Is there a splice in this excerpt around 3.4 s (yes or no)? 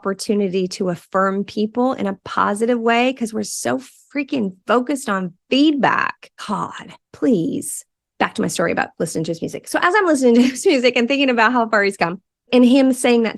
no